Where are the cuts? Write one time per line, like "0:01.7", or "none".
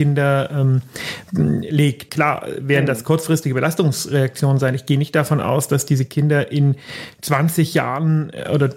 0:02.1